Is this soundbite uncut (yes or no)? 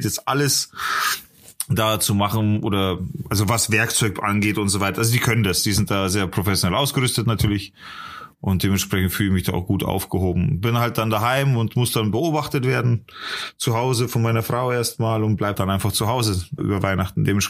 no